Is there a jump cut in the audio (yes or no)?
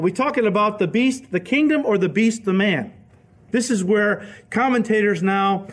no